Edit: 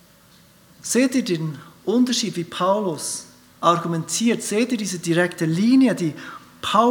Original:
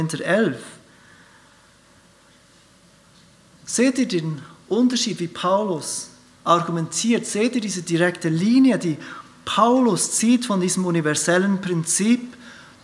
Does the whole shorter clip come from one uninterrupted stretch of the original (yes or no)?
yes